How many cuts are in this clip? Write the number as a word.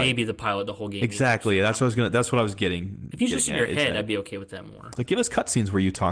one